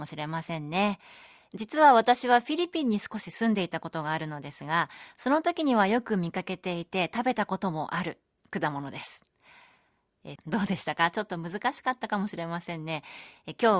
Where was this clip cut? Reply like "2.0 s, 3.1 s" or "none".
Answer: 10.4 s